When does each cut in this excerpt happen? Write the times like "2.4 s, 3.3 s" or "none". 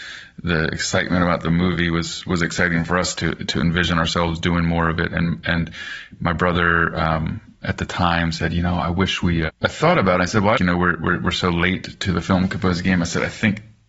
9.5 s, 10.5 s

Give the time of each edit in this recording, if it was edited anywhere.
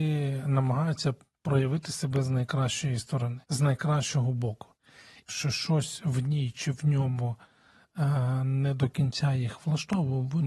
3.4 s, 5.3 s

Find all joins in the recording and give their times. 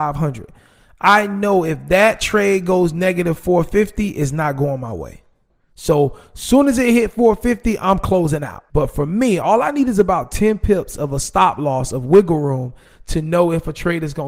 8.7 s

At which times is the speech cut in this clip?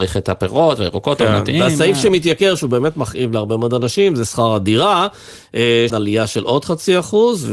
5.9 s

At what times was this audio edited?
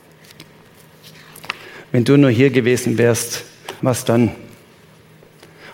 3.8 s

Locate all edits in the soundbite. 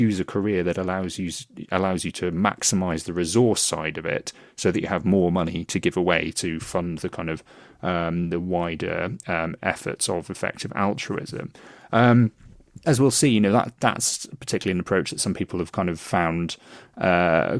12.8 s

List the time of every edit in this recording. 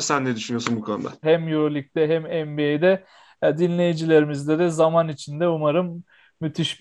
1.2 s

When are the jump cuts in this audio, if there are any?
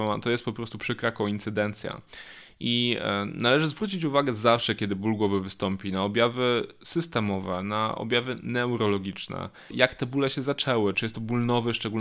9.7 s, 10.9 s

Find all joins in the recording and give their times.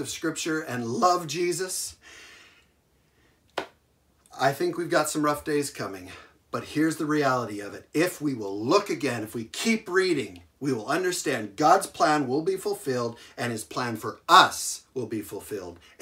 none

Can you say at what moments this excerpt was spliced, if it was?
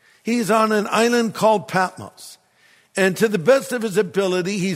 none

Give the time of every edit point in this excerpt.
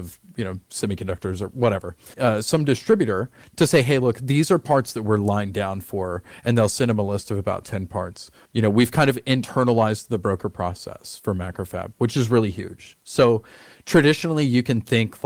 2.1 s, 8.4 s

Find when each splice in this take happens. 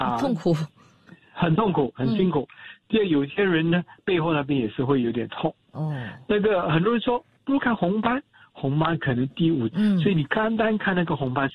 7.6 s, 9.7 s

